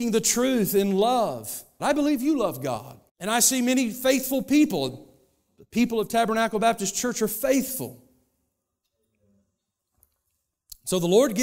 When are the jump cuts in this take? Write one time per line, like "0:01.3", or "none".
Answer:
0:01.8
0:03.1